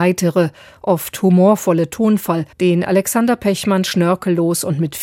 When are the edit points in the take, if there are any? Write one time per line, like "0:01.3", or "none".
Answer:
0:02.5